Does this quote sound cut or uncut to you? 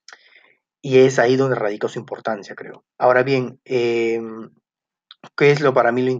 cut